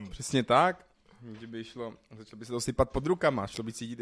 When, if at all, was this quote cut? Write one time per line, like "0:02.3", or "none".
none